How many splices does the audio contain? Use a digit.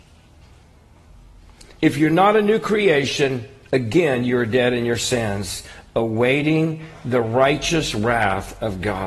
1